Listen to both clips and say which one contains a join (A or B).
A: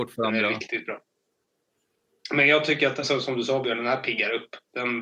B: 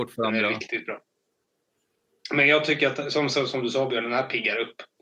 A